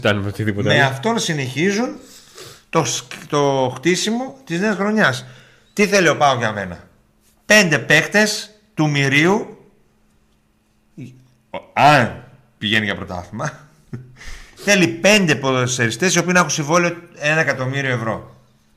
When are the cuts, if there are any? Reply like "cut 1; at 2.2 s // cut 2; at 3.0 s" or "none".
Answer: none